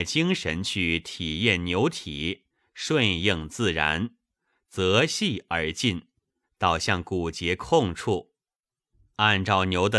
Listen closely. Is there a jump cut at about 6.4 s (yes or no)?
yes